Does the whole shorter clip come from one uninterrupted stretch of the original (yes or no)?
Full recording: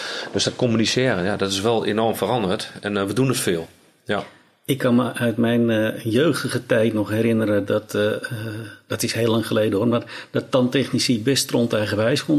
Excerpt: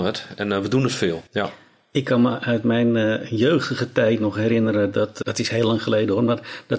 no